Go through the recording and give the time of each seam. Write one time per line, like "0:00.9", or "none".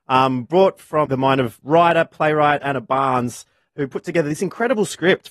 0:01.1